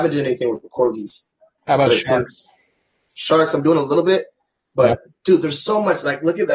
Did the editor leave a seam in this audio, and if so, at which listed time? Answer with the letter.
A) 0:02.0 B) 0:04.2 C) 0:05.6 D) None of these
D